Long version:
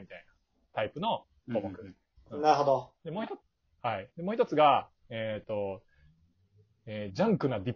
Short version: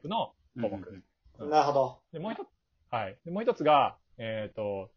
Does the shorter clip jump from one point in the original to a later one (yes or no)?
no